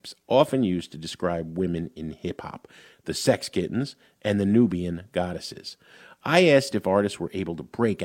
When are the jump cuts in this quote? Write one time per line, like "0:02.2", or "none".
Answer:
none

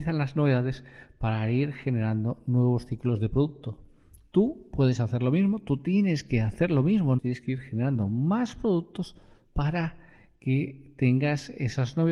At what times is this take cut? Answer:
0:07.2

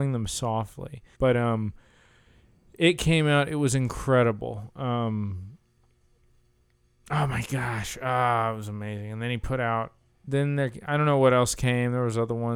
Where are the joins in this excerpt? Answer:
0:01.1
0:10.1

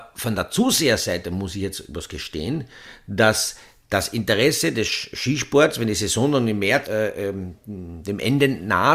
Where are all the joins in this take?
0:06.8

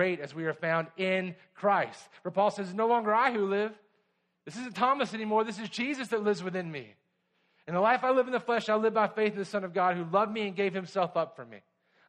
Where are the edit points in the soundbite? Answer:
none

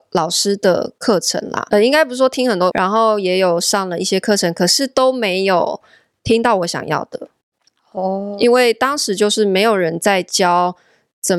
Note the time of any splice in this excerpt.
0:01.7
0:02.7

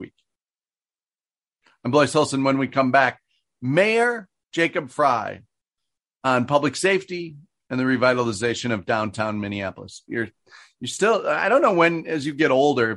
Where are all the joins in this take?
0:10.1

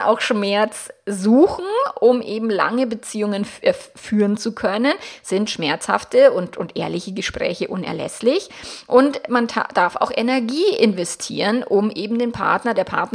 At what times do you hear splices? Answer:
none

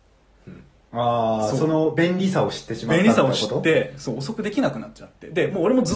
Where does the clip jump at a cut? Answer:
none

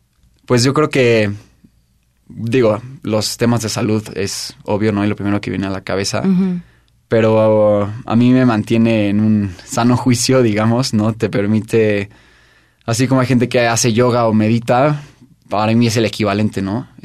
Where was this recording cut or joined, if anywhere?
none

